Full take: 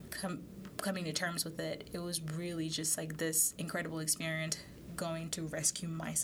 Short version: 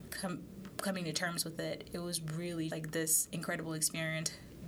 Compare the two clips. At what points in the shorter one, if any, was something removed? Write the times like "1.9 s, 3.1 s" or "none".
2.7 s